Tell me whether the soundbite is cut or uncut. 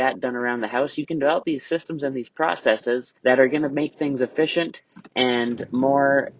cut